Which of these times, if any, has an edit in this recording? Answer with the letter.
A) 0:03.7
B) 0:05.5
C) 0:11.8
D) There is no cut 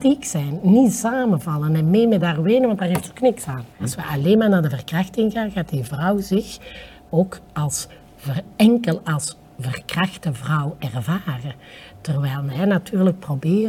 A